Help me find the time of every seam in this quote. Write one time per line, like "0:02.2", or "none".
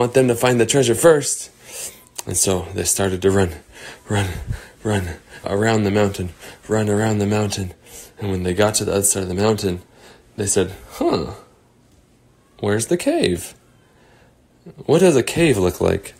0:05.4